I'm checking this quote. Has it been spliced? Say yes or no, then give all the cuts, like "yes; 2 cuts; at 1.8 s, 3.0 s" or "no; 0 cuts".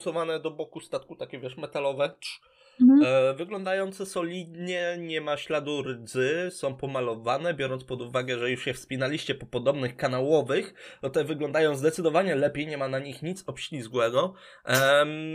no; 0 cuts